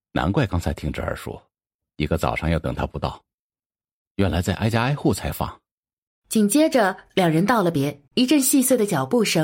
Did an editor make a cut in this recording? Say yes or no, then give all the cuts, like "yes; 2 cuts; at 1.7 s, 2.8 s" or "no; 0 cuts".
yes; 2 cuts; at 6.1 s, 8.1 s